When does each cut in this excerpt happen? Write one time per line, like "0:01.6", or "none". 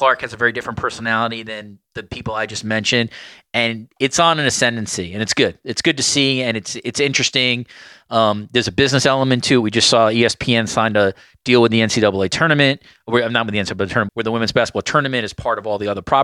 0:14.1